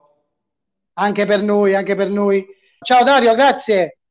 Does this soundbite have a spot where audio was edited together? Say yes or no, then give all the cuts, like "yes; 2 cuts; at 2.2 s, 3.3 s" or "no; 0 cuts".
yes; 1 cut; at 2.8 s